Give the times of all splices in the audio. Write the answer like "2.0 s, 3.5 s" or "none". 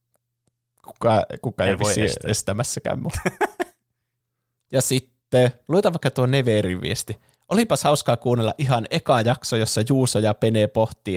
none